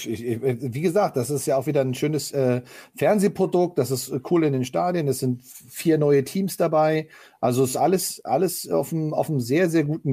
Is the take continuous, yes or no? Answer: yes